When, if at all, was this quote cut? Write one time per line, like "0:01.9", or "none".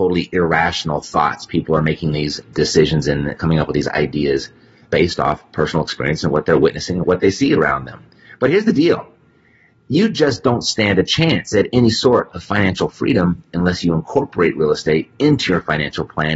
0:07.0